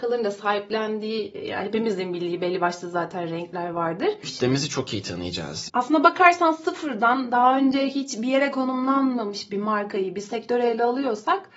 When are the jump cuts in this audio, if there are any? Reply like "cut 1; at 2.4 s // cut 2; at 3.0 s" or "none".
cut 1; at 4.2 s // cut 2; at 5.7 s